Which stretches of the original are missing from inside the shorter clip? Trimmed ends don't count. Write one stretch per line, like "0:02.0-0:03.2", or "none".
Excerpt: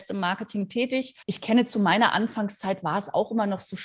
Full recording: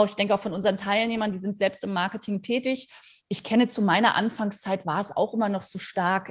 0:03.0-0:03.2